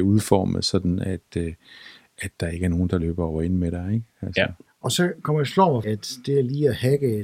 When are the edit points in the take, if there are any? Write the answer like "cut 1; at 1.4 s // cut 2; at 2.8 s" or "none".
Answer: cut 1; at 4.7 s // cut 2; at 5.8 s

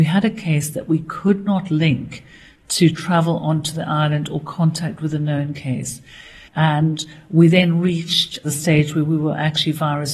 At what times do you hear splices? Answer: cut 1; at 6.5 s

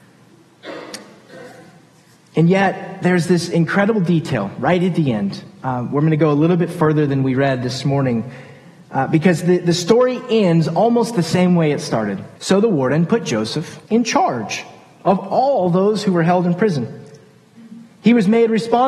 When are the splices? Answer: cut 1; at 12.3 s // cut 2; at 13.8 s

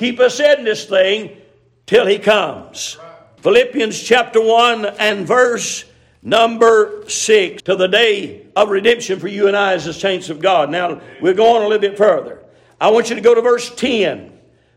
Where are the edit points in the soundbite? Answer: cut 1; at 3.4 s // cut 2; at 7.6 s

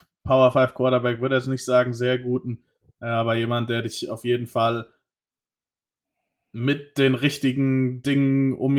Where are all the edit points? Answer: none

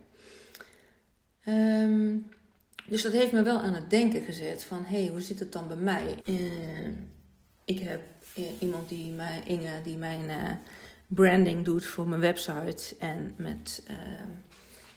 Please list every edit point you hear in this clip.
cut 1; at 6.2 s

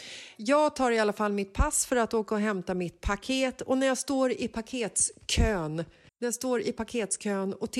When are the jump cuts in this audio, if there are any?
cut 1; at 6.1 s

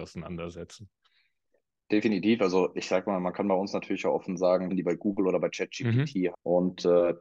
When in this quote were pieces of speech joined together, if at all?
cut 1; at 4.7 s // cut 2; at 6.3 s

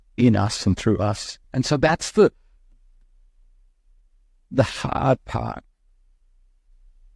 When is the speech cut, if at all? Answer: cut 1; at 1.4 s

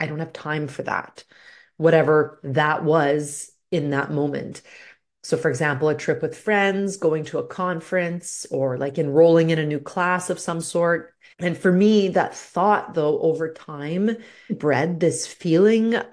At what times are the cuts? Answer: cut 1; at 11.3 s // cut 2; at 14.5 s

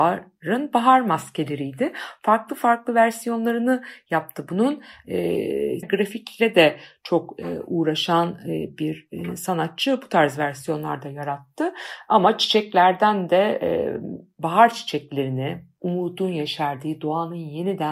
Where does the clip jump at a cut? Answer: cut 1; at 5.8 s

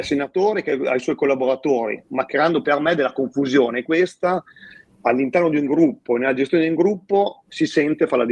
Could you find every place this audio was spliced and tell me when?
none

